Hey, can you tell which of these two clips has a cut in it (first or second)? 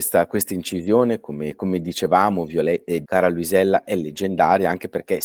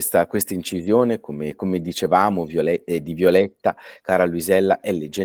first